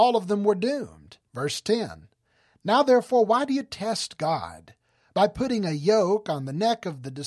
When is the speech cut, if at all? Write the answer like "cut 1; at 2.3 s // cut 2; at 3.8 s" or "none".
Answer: cut 1; at 1.3 s